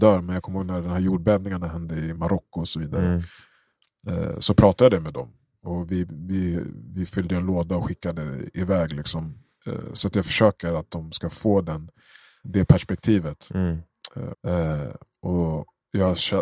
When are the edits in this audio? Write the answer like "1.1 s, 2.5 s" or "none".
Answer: 12.4 s, 14.3 s